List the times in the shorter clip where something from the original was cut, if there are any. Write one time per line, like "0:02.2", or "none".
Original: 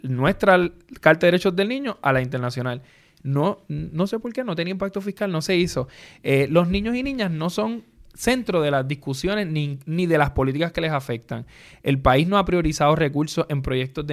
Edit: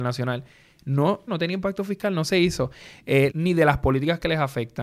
0:01.3
0:03.3